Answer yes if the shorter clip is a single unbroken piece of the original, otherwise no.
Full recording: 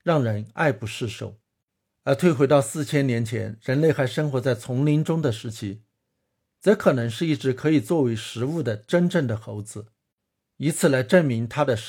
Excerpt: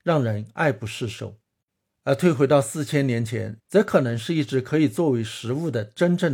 no